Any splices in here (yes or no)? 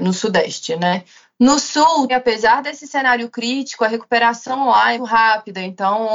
yes